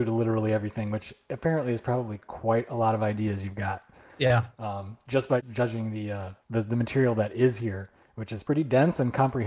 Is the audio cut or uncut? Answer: uncut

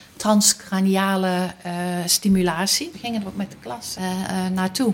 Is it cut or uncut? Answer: cut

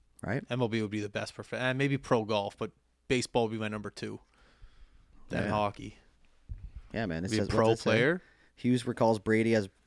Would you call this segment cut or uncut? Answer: uncut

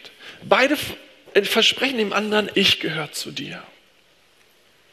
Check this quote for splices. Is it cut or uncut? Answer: cut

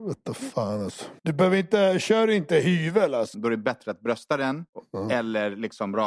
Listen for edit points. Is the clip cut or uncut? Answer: cut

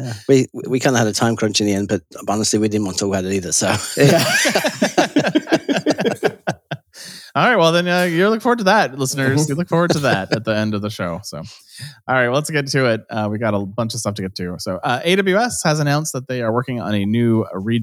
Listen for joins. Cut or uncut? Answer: uncut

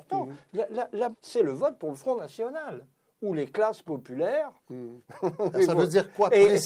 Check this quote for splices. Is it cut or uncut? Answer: cut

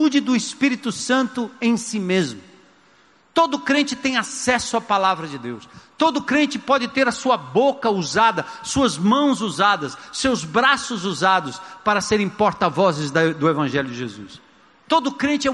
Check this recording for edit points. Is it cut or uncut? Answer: uncut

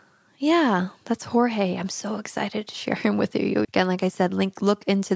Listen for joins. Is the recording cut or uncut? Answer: cut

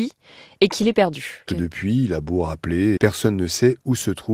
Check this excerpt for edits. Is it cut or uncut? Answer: cut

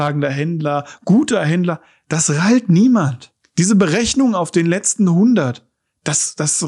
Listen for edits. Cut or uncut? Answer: uncut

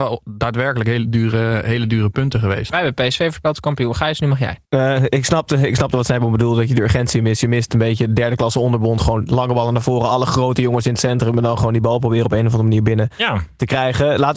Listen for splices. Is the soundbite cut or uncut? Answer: cut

